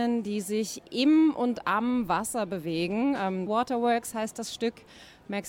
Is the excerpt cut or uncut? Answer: cut